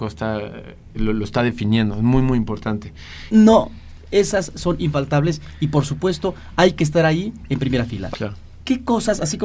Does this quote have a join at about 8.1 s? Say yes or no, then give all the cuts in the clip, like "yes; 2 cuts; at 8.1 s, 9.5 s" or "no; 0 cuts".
yes; 2 cuts; at 3.3 s, 8.1 s